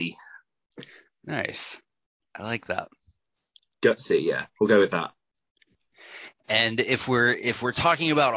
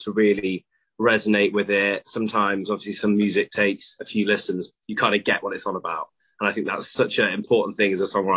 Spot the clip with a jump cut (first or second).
second